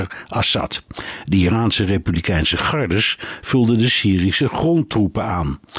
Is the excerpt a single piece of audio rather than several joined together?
yes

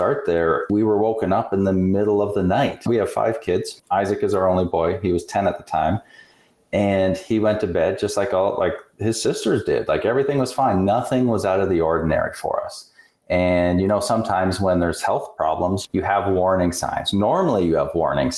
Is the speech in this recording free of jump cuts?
yes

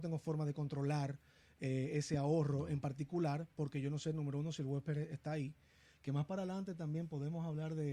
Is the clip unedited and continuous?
yes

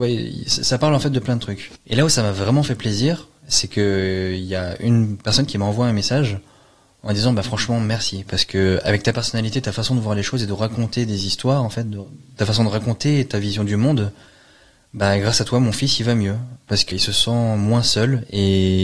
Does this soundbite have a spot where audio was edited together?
yes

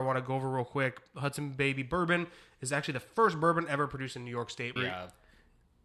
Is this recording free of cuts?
no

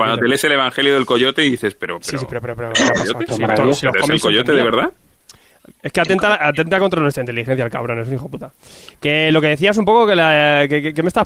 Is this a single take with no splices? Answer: no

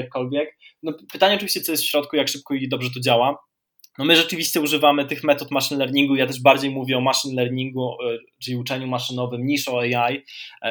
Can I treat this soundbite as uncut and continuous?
yes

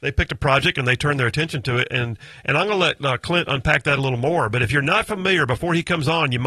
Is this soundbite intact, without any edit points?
yes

